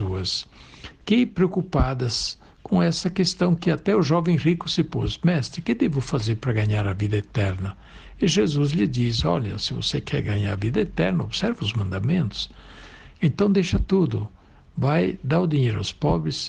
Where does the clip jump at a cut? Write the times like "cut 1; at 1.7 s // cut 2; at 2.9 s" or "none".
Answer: cut 1; at 13.1 s